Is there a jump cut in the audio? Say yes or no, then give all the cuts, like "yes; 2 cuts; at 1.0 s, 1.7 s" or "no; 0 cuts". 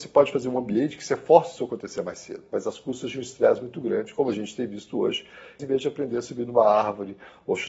yes; 1 cut; at 5.6 s